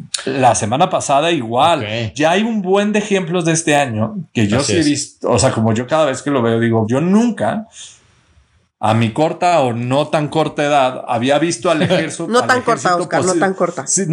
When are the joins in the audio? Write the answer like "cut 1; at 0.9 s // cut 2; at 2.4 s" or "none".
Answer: cut 1; at 2.1 s // cut 2; at 6.8 s